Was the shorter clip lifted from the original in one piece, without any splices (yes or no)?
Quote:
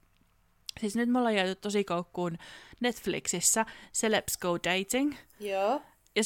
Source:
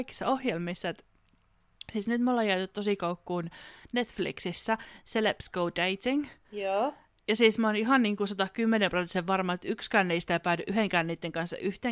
yes